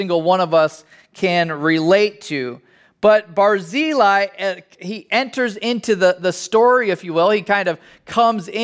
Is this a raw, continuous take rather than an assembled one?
yes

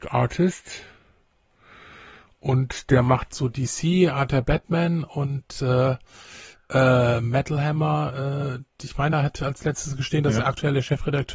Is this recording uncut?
yes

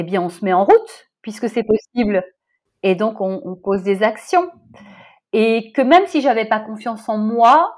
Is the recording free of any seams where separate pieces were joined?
yes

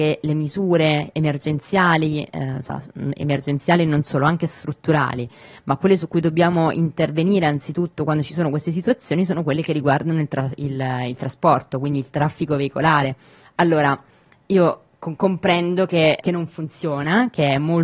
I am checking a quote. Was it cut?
yes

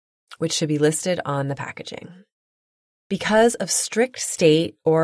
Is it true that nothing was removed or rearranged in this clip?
yes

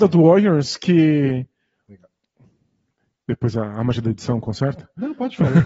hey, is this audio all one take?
yes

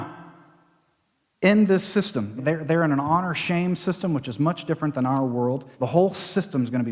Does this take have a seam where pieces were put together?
yes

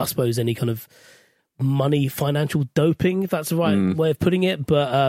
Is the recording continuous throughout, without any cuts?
yes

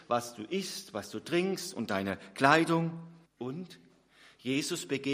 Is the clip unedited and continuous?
no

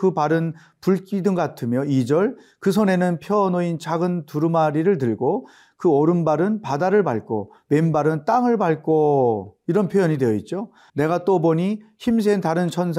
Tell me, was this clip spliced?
yes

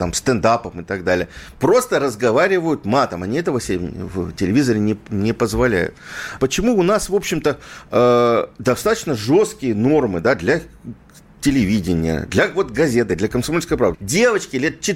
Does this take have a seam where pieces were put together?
yes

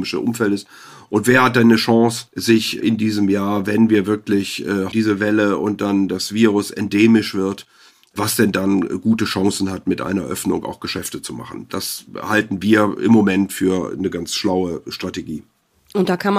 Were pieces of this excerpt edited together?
yes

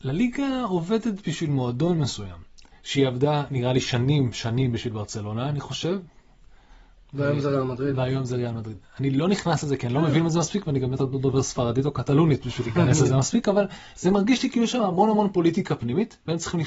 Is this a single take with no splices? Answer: yes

